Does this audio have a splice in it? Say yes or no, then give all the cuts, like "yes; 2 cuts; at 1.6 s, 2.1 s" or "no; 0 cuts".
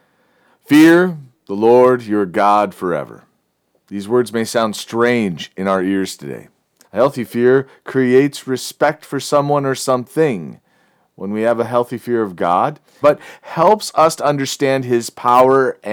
yes; 2 cuts; at 6.8 s, 13.0 s